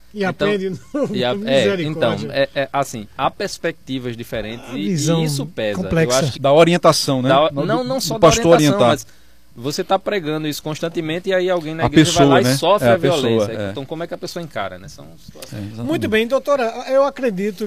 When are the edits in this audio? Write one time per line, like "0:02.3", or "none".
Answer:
0:06.4